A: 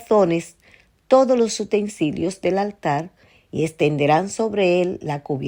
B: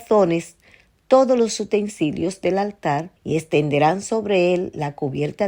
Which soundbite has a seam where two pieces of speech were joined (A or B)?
B